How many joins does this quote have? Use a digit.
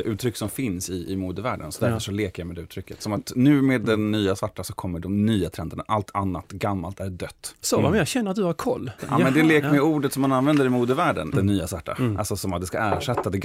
3